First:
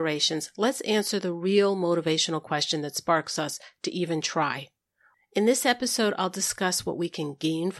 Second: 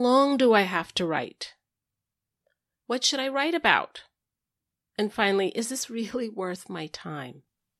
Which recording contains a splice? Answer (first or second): first